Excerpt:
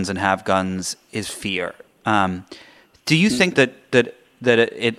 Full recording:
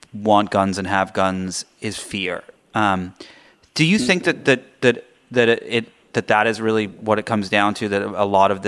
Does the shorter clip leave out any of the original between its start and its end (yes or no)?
yes